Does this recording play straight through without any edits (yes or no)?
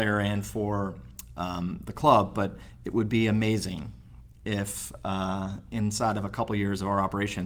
yes